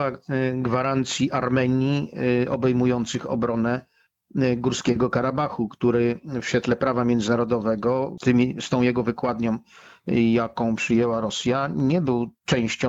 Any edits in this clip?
yes; 1 cut; at 8.2 s

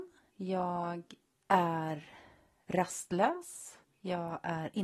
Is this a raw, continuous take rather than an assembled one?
yes; 0 cuts

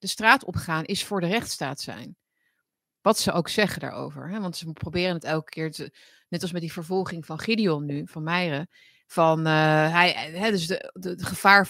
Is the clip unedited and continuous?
yes; 0 cuts

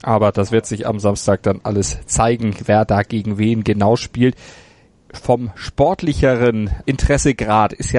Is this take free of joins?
yes; 0 cuts

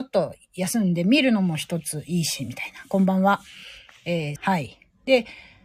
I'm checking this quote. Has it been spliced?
yes; 1 cut; at 4.4 s

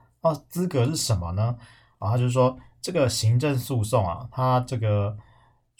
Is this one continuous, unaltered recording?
yes; 0 cuts

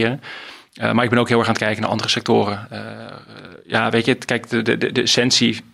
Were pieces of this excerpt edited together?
no; 0 cuts

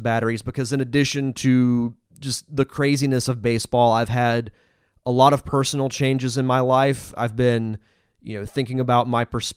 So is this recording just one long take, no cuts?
yes; 0 cuts

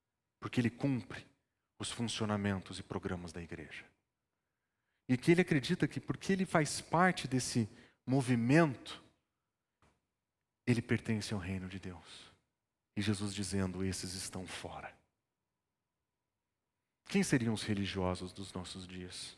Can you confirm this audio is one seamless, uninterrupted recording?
no; 1 cut; at 12.9 s

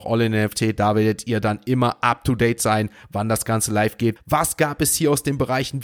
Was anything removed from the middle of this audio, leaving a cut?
yes; 1 cut; at 4.2 s

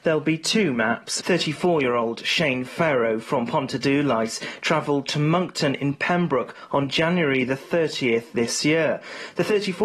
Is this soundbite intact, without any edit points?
no; 1 cut; at 1.2 s

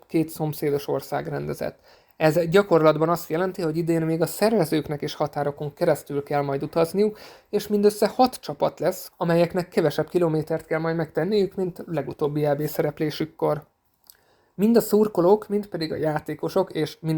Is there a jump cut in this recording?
yes; 1 cut; at 9.1 s

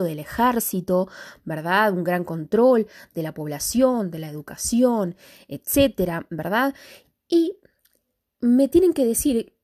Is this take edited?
no; 0 cuts

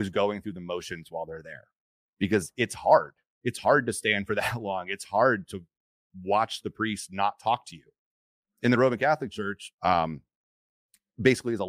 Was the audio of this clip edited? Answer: yes; 1 cut; at 9.8 s

